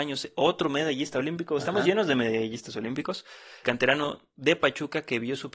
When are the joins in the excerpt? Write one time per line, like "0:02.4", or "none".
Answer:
0:03.6